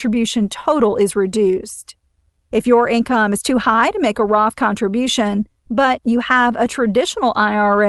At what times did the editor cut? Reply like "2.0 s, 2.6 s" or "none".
none